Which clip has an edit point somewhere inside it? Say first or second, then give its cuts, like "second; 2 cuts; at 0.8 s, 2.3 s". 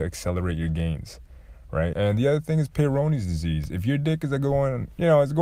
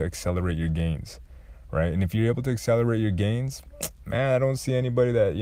first; 1 cut; at 1.9 s